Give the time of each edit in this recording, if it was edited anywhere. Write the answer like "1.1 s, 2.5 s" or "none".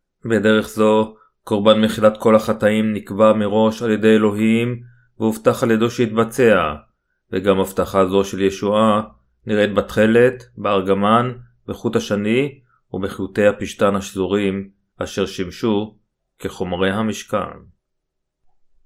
none